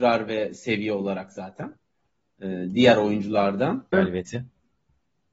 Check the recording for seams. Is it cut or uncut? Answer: cut